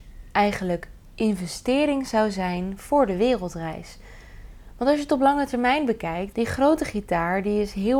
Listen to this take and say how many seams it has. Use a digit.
1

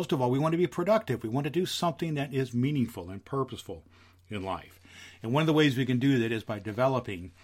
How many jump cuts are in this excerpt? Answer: 0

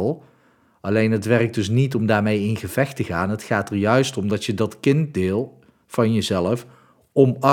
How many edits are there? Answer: 0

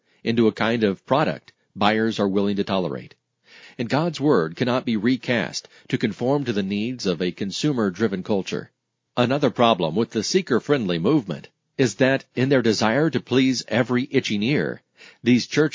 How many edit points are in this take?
2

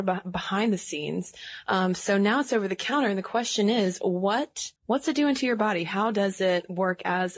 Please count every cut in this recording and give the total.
1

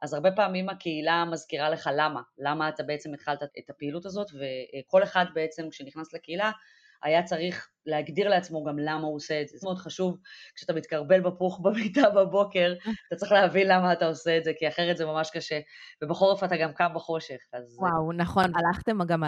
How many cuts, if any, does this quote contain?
1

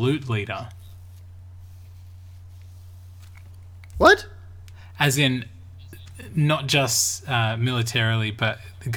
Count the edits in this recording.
0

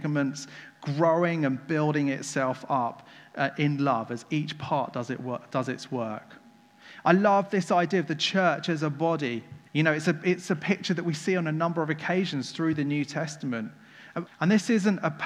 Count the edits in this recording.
2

